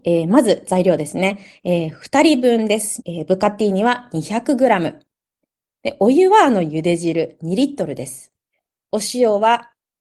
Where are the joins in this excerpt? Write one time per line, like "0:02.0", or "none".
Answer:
0:03.0